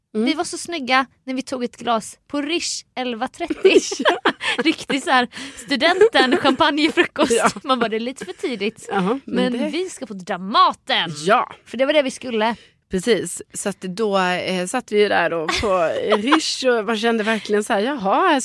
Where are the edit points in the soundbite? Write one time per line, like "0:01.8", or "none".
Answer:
none